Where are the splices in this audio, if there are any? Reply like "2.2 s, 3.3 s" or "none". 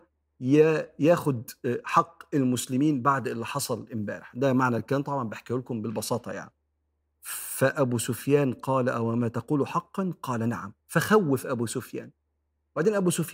10.8 s